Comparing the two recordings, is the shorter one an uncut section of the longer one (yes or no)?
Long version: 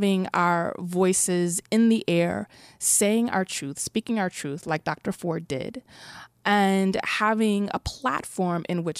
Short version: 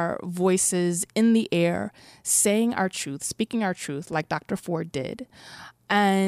yes